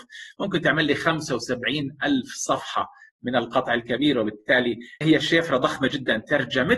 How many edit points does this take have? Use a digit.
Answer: 1